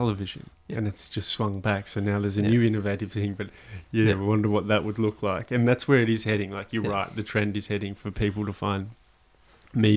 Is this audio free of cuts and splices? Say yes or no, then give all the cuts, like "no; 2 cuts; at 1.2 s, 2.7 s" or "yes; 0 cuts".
yes; 0 cuts